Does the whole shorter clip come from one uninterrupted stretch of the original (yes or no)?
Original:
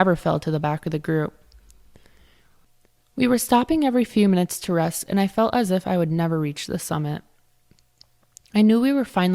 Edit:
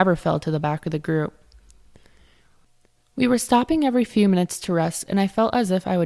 yes